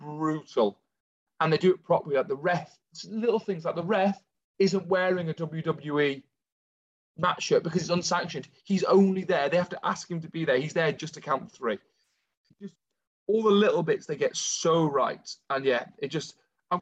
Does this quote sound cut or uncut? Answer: uncut